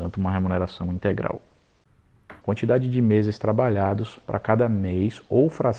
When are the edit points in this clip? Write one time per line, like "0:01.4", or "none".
0:02.4